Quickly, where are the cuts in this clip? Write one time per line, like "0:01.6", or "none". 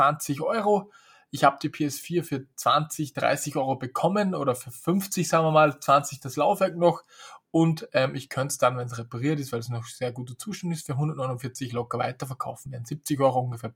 none